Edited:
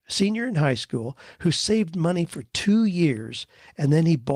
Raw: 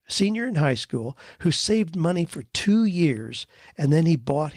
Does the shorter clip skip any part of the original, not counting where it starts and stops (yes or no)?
no